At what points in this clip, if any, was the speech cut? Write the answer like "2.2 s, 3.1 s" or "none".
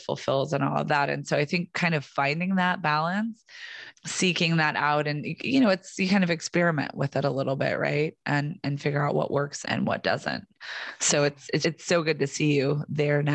3.9 s, 9.6 s, 11.6 s